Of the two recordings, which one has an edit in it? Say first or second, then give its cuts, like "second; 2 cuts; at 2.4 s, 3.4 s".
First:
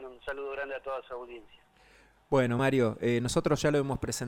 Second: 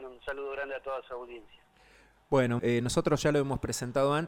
second; 1 cut; at 2.6 s